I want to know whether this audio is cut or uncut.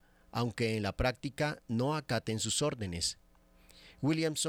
uncut